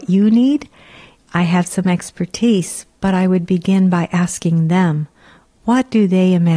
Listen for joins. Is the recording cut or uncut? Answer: cut